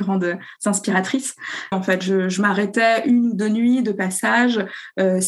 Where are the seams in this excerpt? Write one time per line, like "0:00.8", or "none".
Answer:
0:01.7